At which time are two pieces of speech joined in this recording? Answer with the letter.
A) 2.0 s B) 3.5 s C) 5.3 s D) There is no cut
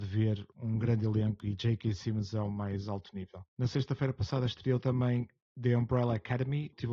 D